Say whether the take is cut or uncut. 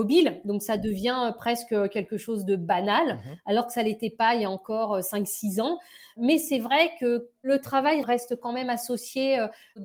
uncut